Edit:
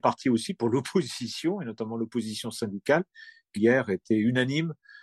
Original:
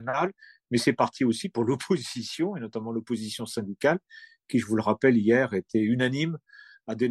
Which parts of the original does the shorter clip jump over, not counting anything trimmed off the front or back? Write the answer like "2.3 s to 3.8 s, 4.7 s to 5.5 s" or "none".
4.5 s to 5.2 s